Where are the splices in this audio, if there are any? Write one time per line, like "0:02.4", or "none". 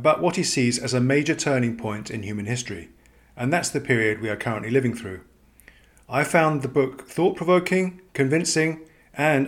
none

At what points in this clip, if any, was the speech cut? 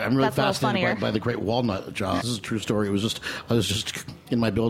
0:02.2

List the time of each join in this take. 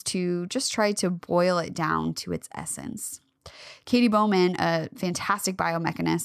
none

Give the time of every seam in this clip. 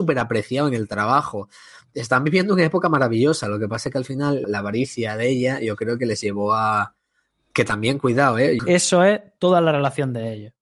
0:04.4
0:08.6

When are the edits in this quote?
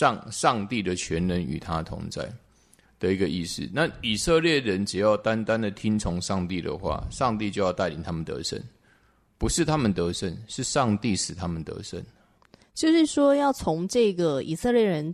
none

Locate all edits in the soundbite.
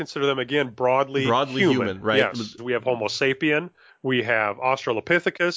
0:02.6
0:03.9

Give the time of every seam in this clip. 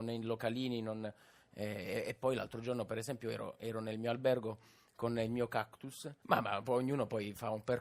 0:06.2

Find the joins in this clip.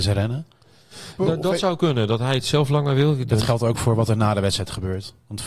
0:01.2
0:03.3

